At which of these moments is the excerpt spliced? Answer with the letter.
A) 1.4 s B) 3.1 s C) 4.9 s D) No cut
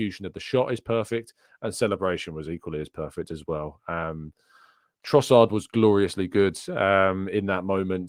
D